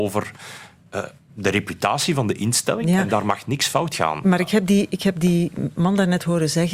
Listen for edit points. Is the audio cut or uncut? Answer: uncut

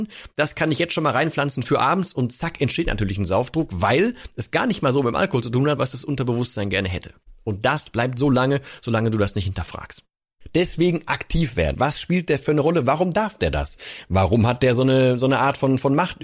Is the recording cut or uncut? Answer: cut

